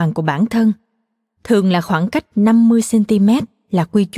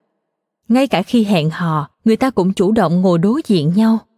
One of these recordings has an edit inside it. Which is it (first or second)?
second